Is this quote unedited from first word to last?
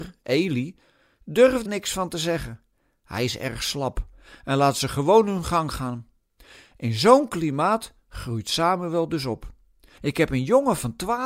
no; 2 cuts; at 1.7 s, 10.0 s

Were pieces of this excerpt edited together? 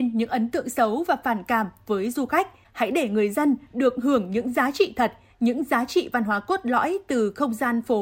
yes; 1 cut; at 2.6 s

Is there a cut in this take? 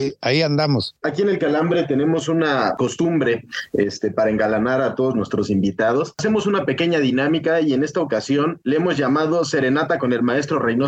yes; 1 cut; at 1.0 s

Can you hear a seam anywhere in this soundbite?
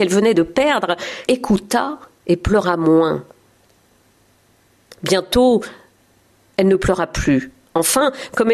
yes; 1 cut; at 1.3 s

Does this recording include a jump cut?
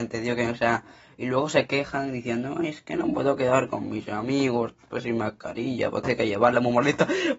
no; 0 cuts

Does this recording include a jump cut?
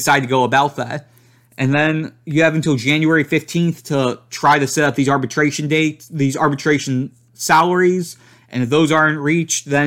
no; 0 cuts

